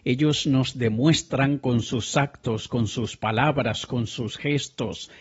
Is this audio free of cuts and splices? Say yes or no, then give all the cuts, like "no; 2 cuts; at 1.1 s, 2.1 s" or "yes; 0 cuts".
yes; 0 cuts